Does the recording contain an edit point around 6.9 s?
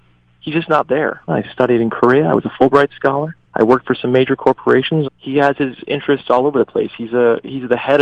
no; 3 cuts; at 1.3 s, 3.4 s, 5.0 s

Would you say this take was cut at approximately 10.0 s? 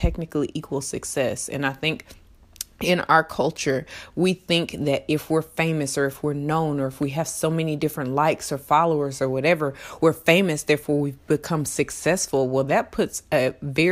no; 0 cuts

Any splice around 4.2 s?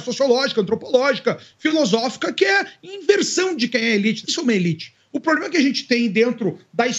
yes; 1 cut; at 4.2 s

